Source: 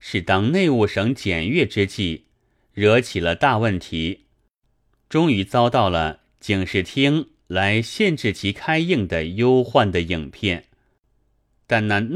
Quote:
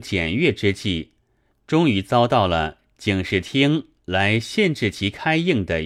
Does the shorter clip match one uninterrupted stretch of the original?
no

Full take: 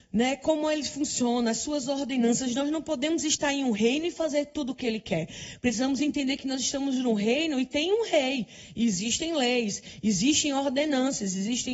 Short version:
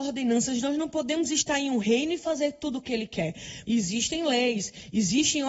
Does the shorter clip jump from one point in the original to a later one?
yes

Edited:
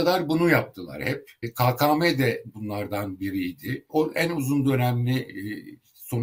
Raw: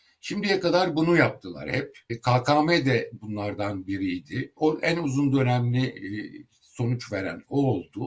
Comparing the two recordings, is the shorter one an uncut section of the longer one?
yes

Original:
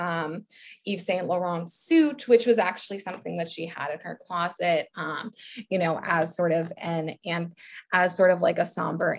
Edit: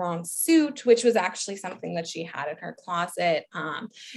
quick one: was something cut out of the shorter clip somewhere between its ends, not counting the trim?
no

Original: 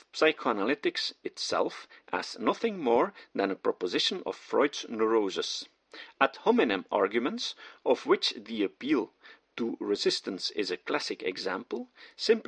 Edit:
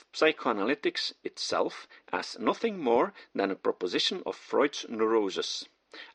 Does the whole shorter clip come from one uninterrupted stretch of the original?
yes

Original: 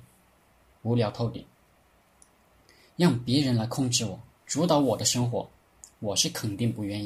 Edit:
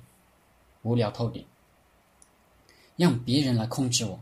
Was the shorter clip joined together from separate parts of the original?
no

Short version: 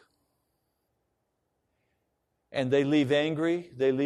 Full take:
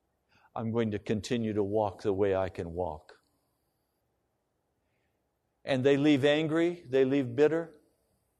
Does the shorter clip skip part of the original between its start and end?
no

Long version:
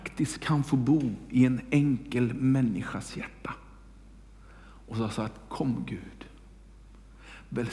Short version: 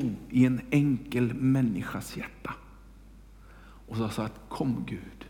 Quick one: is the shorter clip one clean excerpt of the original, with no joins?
yes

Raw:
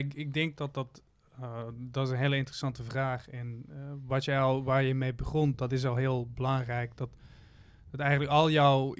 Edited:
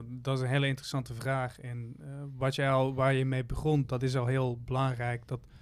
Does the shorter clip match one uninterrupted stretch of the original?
yes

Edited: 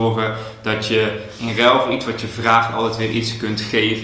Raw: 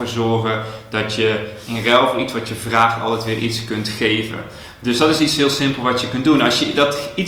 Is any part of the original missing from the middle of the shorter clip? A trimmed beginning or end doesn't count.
no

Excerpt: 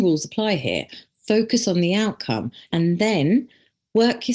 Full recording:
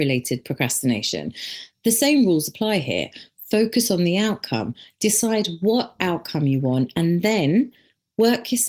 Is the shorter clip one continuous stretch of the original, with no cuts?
no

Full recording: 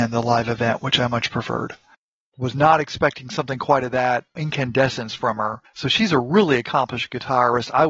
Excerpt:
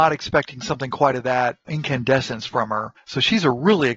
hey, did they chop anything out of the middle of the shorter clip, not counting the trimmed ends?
no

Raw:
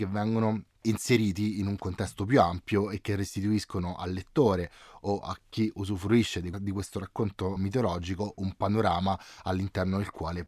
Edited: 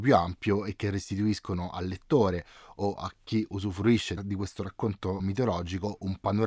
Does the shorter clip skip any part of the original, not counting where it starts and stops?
yes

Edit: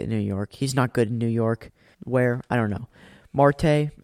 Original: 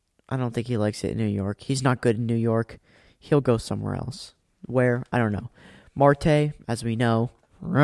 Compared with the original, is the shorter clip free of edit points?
no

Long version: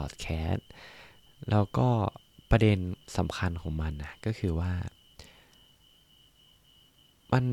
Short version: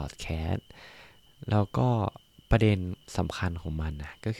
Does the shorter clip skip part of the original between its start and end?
no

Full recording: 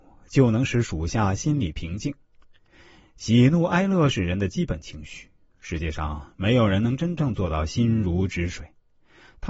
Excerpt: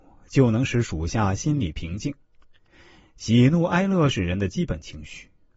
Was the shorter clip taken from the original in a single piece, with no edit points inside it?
yes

